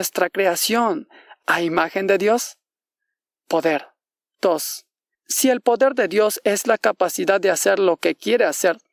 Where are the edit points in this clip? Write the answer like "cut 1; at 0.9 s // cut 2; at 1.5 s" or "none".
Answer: none